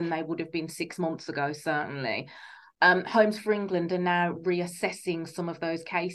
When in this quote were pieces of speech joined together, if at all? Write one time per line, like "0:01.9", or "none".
none